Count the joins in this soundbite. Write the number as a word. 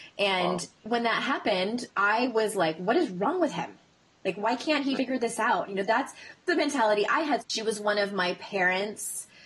two